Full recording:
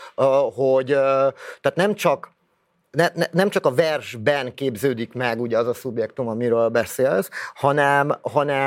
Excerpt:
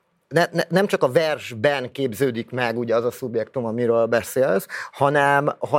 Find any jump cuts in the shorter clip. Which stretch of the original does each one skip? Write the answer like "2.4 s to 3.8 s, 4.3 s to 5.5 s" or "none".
none